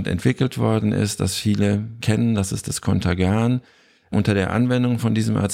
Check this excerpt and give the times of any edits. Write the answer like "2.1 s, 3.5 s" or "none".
none